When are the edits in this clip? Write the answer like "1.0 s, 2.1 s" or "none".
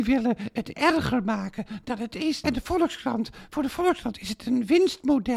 2.4 s